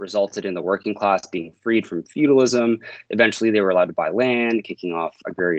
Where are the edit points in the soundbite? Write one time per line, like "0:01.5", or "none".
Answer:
none